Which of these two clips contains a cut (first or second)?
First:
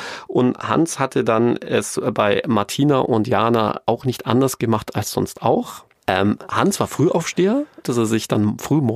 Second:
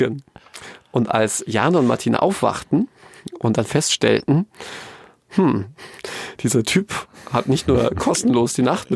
first